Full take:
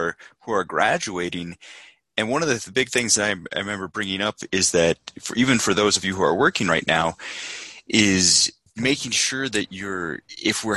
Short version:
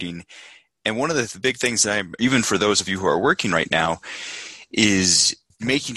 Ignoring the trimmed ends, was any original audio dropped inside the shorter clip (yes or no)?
yes